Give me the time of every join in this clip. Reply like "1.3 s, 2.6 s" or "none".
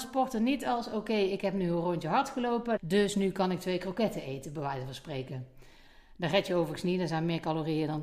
2.8 s